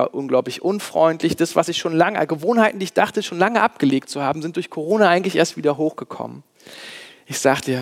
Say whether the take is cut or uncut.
uncut